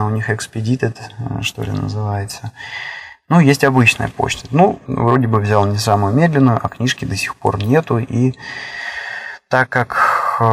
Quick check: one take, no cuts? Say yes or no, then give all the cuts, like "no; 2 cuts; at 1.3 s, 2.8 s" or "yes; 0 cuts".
no; 1 cut; at 4.8 s